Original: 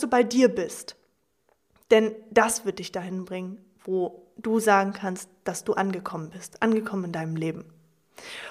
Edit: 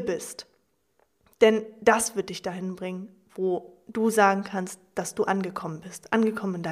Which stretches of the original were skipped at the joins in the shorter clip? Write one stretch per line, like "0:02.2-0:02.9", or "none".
none